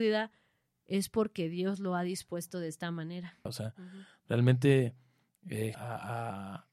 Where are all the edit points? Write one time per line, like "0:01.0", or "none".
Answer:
0:03.5
0:05.7